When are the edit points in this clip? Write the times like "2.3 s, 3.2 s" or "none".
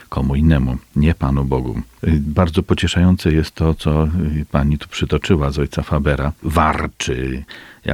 6.4 s